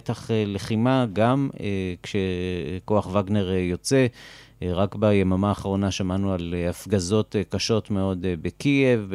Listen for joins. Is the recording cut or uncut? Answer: uncut